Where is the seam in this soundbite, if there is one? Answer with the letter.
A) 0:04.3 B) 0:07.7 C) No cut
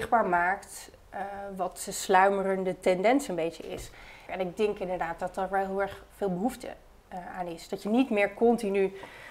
A